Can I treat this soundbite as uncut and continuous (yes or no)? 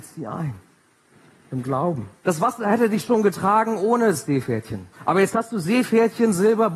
no